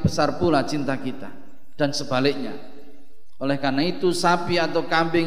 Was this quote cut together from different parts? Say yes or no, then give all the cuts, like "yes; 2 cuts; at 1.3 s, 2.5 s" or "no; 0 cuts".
no; 0 cuts